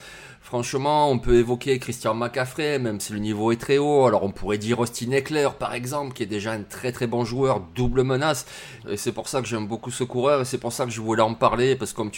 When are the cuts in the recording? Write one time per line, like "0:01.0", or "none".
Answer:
0:08.8